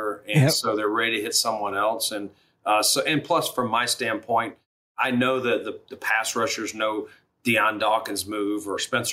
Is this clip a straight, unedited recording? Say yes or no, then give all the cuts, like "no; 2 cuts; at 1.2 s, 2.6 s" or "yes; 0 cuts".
yes; 0 cuts